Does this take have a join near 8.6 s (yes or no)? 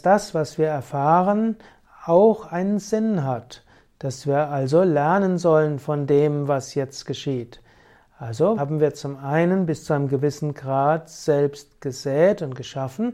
yes